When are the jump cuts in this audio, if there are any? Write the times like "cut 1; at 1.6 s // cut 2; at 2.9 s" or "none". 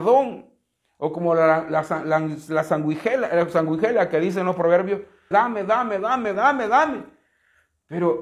cut 1; at 5.3 s // cut 2; at 6.3 s

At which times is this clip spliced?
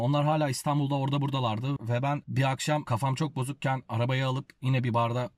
cut 1; at 1.8 s

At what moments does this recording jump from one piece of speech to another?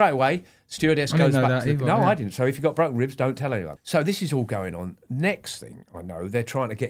cut 1; at 3.8 s

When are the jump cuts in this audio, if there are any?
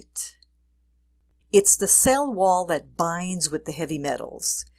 cut 1; at 1.4 s

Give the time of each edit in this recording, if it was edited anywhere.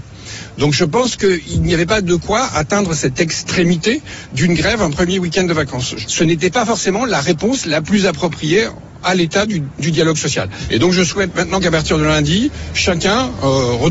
none

